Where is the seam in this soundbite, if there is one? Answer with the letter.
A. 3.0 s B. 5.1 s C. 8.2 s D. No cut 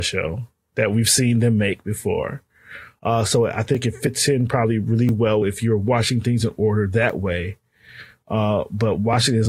D